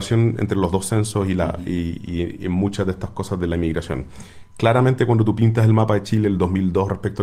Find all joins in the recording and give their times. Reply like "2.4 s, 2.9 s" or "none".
none